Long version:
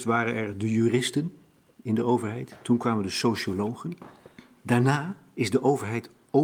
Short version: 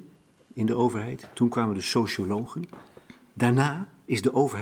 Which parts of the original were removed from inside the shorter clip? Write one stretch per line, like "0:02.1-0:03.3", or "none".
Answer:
none